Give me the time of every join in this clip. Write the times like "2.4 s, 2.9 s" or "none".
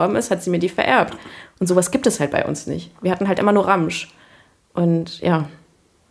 none